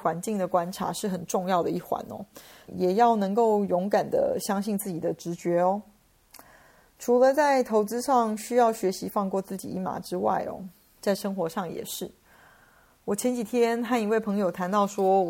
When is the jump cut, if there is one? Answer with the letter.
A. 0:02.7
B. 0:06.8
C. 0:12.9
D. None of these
A